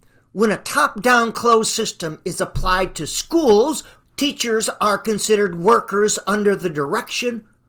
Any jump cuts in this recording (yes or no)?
yes